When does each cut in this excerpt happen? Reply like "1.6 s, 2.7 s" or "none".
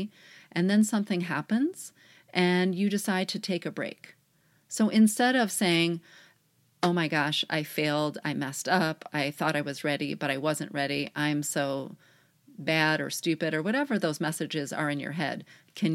none